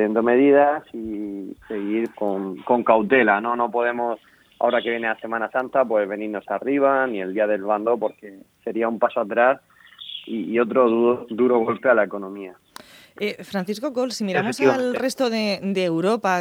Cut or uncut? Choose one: cut